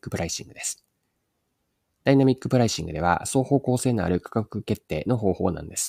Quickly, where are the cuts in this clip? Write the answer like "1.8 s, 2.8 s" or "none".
none